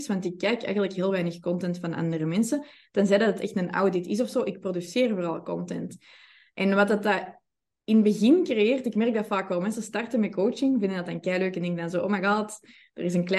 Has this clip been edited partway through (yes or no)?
no